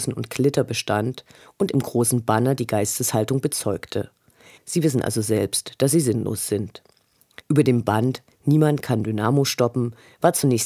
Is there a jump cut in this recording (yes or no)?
yes